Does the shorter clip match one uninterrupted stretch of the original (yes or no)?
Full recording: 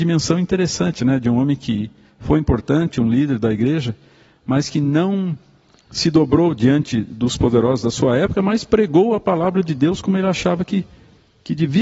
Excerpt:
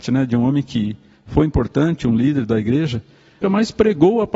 no